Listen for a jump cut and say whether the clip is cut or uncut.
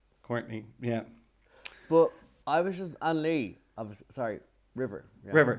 uncut